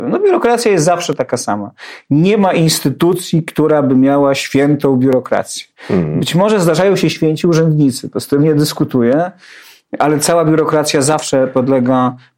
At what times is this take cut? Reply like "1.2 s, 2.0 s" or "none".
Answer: none